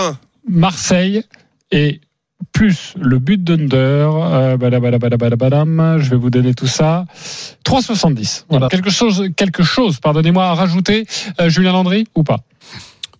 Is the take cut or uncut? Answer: cut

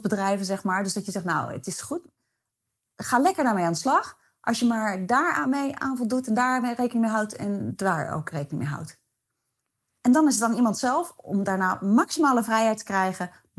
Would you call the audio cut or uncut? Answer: uncut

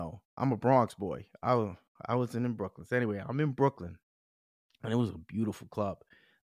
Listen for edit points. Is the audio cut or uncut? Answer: uncut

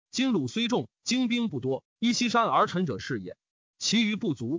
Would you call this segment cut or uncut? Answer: uncut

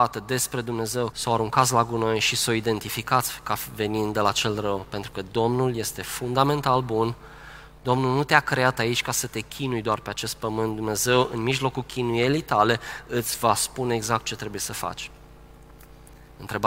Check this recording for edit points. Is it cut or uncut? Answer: cut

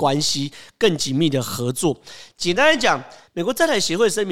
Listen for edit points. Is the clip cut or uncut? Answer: cut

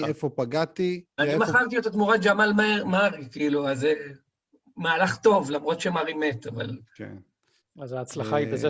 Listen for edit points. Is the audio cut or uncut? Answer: cut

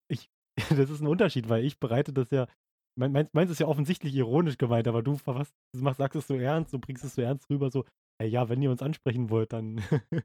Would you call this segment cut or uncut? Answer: uncut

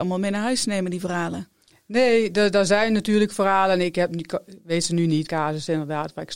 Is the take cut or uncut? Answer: cut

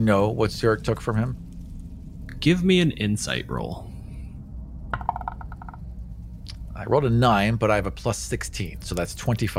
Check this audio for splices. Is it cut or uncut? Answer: uncut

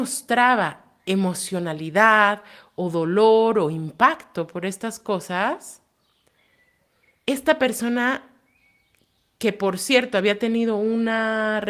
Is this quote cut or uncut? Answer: uncut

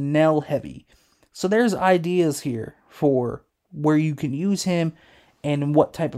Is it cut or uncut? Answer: uncut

